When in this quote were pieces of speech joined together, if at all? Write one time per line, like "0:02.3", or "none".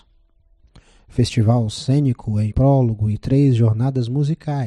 0:02.5

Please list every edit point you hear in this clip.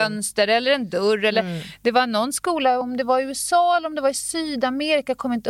none

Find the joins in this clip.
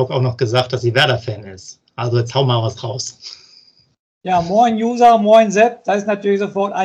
none

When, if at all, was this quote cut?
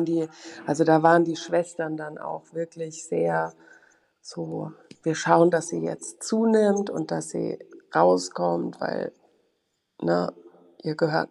none

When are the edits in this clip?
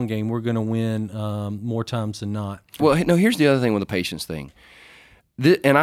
0:02.8

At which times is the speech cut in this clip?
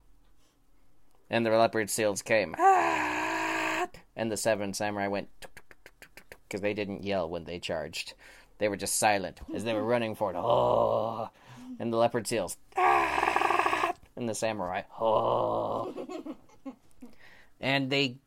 0:09.5

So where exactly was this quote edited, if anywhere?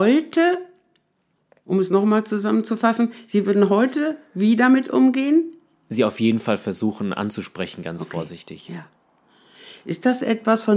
none

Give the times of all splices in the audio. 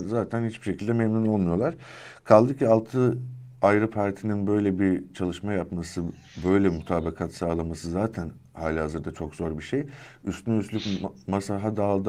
none

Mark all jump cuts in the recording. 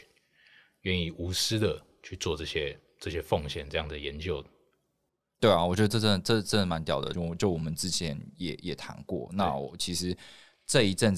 0:07.1

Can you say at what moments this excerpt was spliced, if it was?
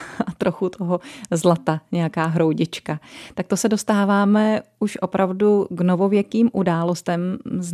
none

